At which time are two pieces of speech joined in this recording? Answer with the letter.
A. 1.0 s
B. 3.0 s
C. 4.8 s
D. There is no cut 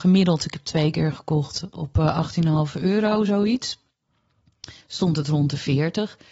C